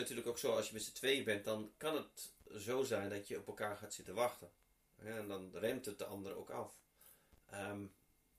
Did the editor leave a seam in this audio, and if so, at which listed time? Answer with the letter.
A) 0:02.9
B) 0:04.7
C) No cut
C